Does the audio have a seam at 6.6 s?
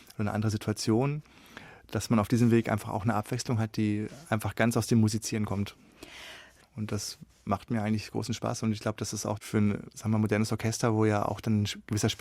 yes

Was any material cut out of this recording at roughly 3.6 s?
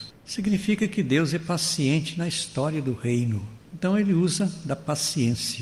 yes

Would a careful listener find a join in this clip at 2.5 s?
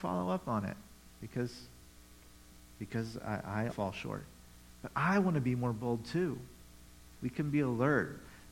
no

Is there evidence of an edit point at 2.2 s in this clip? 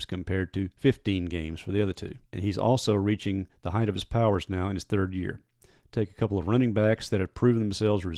yes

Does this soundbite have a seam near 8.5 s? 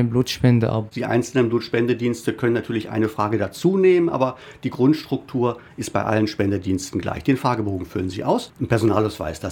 yes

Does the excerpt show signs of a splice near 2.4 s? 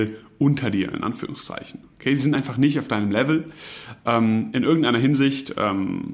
no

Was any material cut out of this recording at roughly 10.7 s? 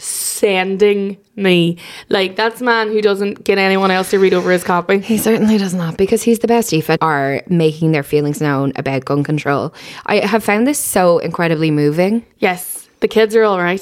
no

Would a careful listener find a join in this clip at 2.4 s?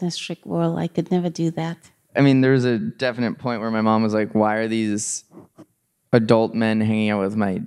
no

